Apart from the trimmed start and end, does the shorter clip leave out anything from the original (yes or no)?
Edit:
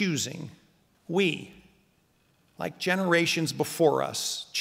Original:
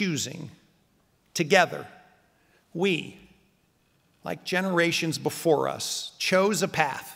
yes